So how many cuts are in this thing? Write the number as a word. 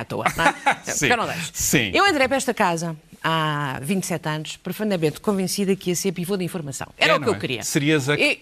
zero